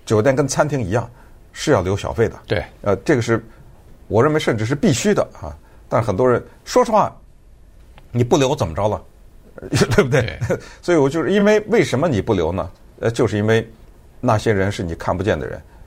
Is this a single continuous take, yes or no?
yes